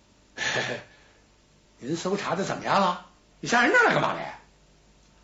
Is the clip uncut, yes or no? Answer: no